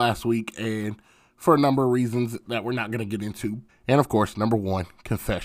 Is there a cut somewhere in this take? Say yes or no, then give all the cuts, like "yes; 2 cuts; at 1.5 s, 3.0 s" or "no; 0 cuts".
yes; 1 cut; at 3.7 s